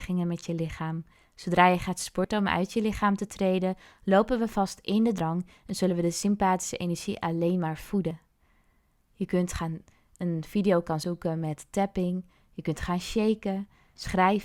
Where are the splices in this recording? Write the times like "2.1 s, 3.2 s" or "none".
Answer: none